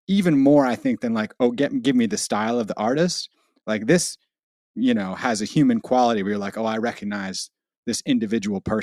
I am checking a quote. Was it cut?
no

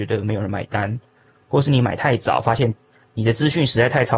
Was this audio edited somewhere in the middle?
no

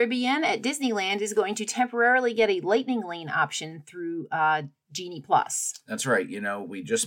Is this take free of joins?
yes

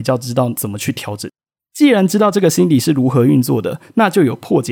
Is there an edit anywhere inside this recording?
yes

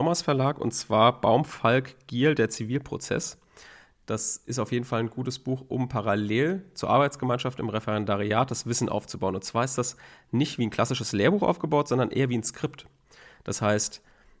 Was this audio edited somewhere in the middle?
no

